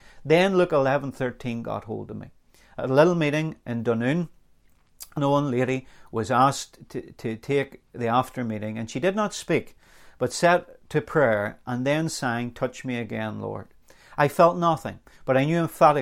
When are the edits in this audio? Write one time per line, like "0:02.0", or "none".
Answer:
0:05.2